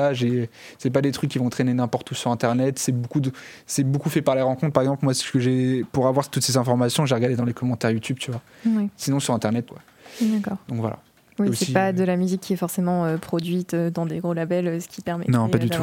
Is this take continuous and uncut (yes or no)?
no